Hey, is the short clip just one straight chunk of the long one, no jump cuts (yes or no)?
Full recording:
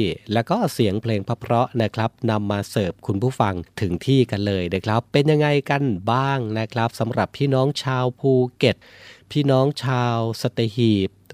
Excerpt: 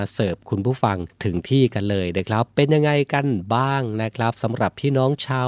yes